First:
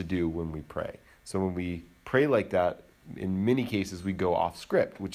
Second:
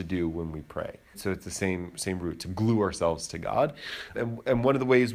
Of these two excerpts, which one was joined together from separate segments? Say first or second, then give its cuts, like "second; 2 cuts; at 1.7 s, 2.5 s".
second; 2 cuts; at 1.1 s, 4.1 s